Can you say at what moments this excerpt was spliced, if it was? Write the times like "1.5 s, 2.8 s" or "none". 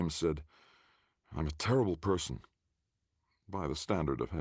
none